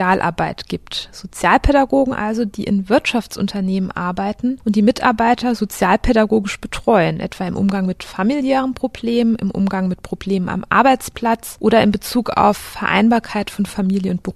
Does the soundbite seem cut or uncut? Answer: uncut